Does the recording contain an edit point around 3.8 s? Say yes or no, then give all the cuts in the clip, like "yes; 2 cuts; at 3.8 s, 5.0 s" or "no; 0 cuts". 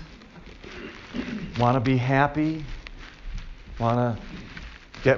no; 0 cuts